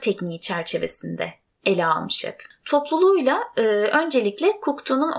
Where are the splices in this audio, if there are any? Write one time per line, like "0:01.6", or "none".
none